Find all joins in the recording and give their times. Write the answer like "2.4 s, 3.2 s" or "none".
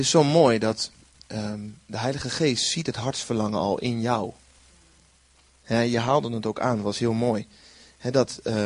none